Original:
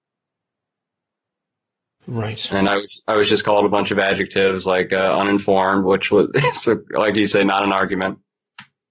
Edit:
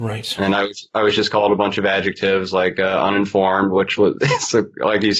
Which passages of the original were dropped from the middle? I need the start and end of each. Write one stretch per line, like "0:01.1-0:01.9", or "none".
none